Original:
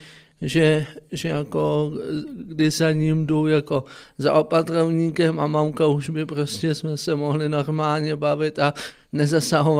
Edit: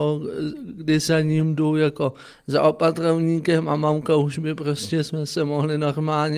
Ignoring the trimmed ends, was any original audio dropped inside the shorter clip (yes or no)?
no